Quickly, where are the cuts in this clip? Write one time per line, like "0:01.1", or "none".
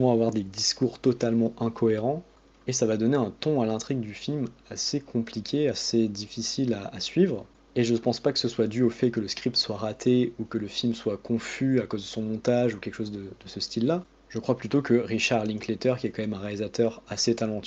none